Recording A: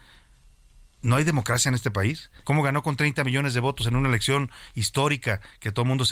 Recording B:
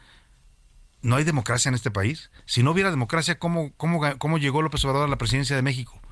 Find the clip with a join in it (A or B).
A